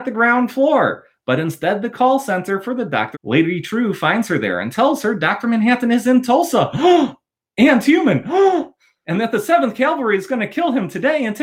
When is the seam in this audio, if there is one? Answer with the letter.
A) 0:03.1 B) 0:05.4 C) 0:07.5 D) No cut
A